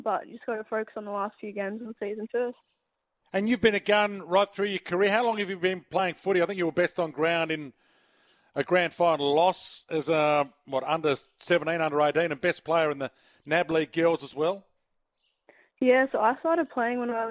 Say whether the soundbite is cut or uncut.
uncut